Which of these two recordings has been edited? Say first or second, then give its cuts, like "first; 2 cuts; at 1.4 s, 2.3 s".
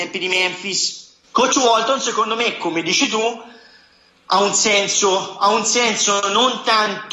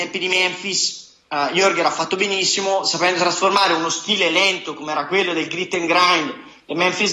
first; 1 cut; at 1.2 s